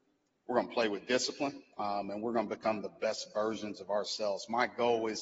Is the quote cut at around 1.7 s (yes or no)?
yes